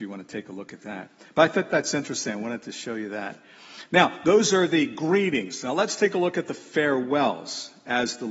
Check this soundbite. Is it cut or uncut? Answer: uncut